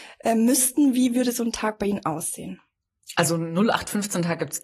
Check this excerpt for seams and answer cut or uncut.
uncut